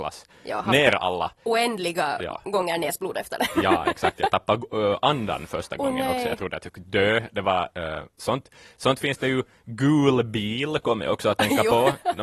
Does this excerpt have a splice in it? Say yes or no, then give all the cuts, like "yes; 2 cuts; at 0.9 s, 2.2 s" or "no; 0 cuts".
no; 0 cuts